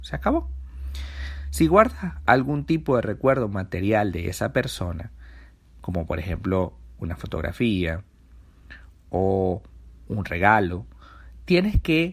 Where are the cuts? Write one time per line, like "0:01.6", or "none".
none